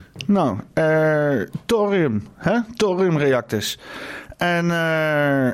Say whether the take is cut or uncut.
uncut